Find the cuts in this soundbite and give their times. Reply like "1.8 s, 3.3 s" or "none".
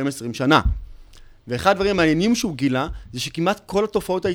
none